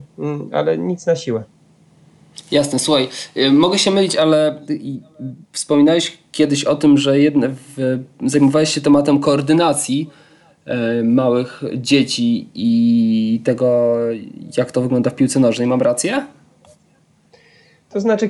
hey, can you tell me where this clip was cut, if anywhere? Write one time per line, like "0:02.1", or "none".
0:05.4